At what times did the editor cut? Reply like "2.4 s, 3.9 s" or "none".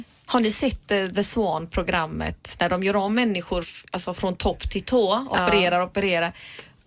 3.6 s